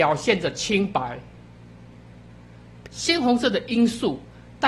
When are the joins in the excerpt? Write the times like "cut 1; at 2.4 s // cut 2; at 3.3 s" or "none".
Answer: cut 1; at 2.9 s